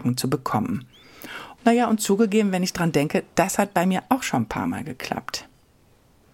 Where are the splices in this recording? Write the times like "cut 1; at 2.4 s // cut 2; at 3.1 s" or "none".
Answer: cut 1; at 1.6 s